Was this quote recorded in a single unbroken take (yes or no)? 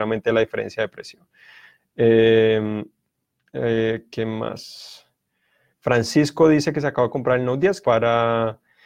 no